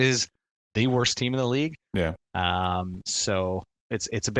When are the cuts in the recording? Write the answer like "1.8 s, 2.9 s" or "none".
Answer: 2.2 s